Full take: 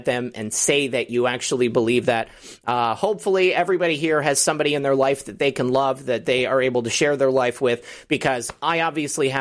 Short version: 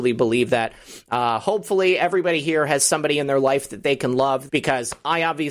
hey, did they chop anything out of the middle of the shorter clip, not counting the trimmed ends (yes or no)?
yes